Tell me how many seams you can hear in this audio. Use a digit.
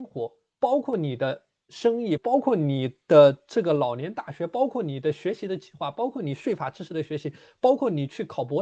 1